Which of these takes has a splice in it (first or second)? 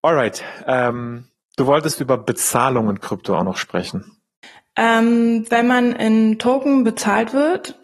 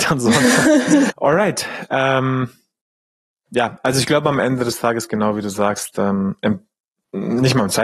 second